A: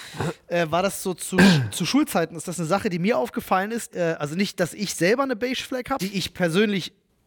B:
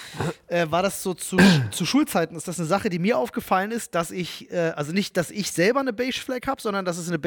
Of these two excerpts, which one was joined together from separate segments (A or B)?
A